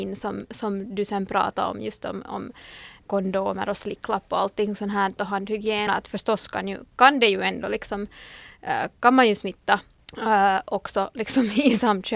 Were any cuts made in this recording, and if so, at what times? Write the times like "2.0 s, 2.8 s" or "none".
5.9 s